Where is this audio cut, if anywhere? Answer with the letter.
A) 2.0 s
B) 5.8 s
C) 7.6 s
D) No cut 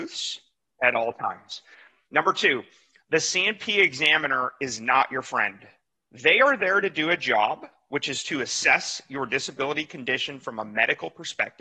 D